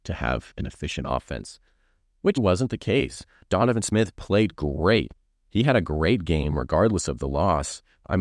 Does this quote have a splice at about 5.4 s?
no; 1 cut; at 2.4 s

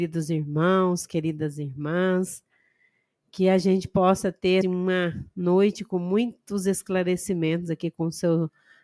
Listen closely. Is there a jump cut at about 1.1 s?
no; 1 cut; at 4.6 s

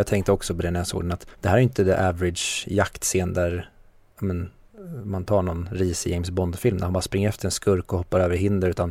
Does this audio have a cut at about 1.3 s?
yes; 1 cut; at 1.3 s

